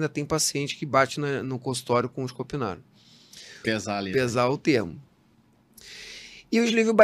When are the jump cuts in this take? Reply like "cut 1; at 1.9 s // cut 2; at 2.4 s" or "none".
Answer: cut 1; at 3.6 s